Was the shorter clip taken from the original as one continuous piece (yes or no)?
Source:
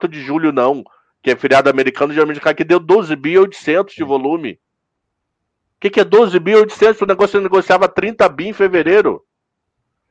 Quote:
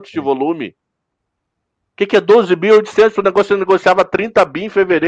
yes